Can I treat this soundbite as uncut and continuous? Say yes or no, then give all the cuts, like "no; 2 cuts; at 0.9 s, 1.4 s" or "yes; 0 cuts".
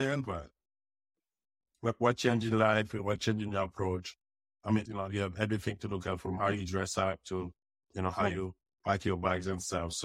no; 1 cut; at 4.9 s